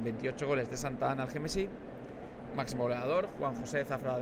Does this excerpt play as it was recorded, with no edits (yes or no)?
no